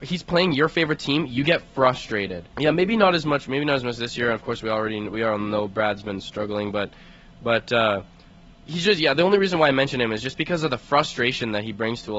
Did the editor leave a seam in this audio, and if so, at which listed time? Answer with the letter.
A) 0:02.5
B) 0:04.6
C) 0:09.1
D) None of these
A